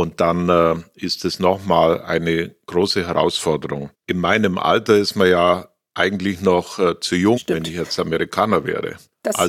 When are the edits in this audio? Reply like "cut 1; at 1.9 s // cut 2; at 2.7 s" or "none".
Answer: cut 1; at 3.9 s // cut 2; at 7.4 s